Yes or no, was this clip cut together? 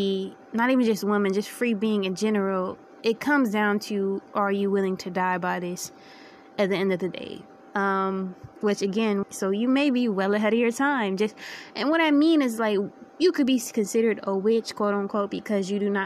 yes